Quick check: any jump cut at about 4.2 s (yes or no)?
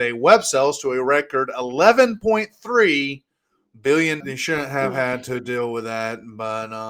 yes